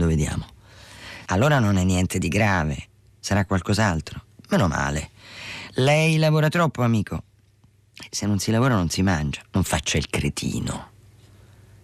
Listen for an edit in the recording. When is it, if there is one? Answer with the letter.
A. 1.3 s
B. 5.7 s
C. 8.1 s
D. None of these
A